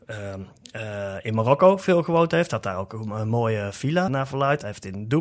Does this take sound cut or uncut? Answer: cut